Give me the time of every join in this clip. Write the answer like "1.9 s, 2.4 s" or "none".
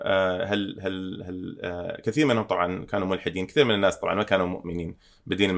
none